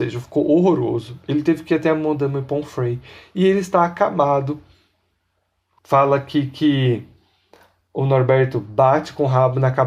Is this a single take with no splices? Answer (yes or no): no